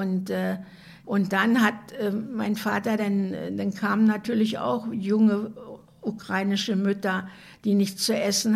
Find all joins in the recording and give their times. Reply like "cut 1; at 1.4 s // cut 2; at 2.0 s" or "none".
none